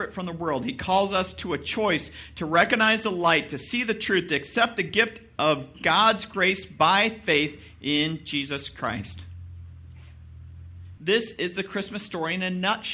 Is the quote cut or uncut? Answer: cut